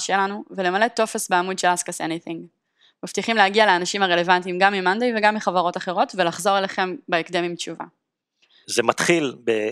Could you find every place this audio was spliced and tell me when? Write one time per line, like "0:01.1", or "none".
0:08.6